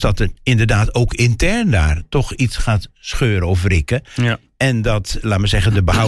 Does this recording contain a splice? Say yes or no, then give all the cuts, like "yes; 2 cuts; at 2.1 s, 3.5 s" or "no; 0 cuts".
no; 0 cuts